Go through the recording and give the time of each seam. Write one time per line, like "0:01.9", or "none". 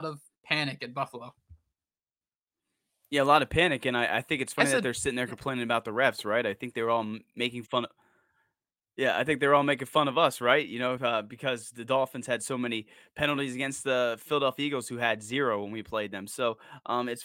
none